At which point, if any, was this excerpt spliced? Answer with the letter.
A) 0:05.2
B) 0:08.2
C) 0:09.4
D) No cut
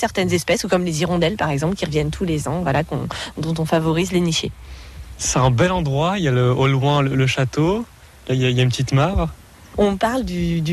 D